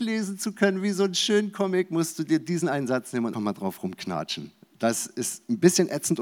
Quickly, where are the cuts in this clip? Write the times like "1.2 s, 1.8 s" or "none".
3.3 s

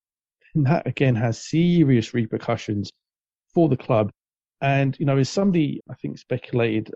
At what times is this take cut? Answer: 5.8 s

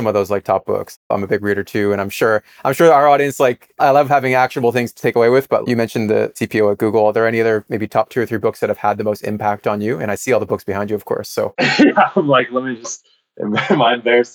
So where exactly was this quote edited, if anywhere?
5.6 s

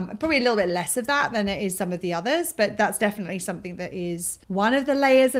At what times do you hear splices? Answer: 4.4 s

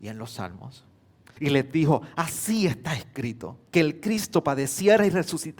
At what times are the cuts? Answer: 1.4 s, 3.7 s

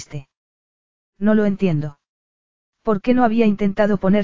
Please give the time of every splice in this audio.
1.0 s, 2.7 s

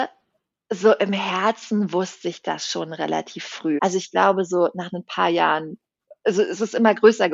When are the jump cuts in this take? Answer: 3.8 s

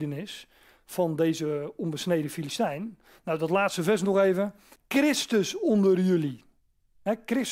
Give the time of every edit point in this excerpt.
3.2 s, 4.7 s

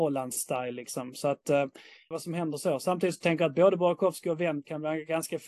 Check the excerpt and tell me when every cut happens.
2.1 s

